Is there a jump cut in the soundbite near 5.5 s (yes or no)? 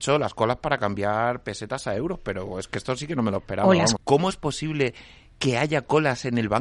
no